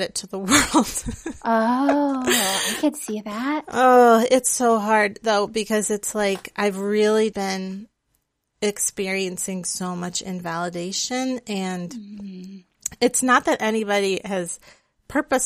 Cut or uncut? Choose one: cut